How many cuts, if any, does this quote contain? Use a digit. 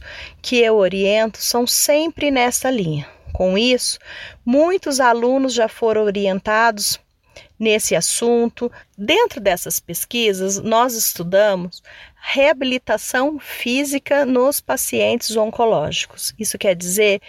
1